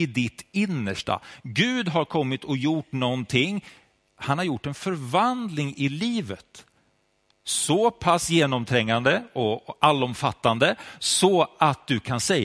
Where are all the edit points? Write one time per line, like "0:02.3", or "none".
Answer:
none